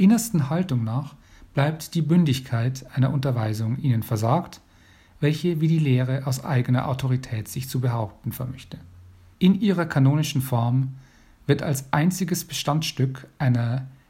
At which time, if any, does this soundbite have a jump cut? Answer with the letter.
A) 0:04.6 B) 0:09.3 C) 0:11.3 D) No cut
B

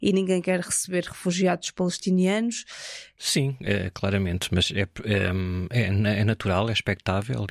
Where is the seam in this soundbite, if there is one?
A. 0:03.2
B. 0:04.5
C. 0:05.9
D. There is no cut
A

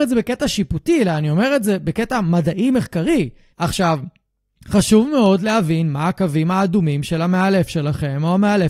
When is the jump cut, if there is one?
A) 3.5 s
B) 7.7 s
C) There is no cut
A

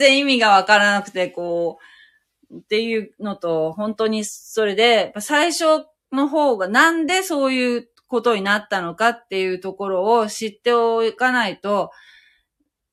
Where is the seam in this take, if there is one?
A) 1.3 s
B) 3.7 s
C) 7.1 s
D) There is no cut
D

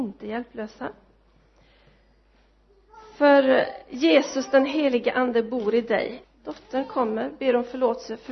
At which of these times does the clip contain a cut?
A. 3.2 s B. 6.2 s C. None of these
B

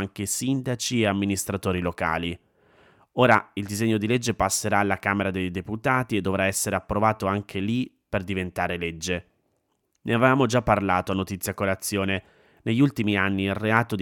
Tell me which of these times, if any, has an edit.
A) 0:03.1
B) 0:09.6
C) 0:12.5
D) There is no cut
D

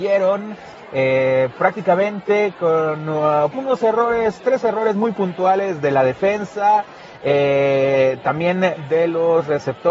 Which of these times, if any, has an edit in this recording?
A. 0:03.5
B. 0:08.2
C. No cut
A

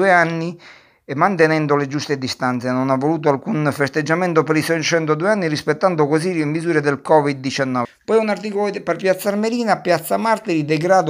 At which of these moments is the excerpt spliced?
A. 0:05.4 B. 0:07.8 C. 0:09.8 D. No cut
B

